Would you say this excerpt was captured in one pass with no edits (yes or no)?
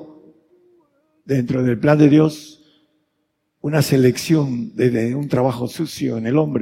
yes